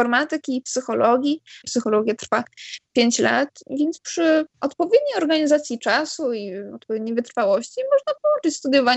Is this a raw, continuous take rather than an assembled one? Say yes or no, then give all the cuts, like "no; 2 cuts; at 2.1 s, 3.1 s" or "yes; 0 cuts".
no; 2 cuts; at 1.6 s, 4.5 s